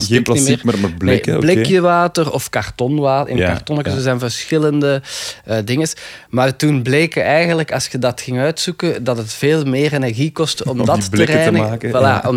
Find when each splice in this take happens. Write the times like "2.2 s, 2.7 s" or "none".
none